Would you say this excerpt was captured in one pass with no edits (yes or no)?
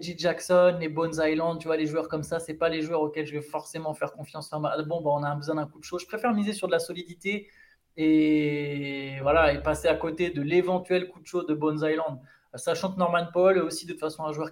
yes